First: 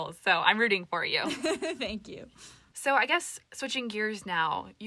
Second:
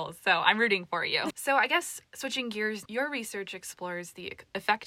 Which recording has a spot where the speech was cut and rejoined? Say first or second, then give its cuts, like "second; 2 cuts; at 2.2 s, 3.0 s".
second; 2 cuts; at 1.3 s, 2.9 s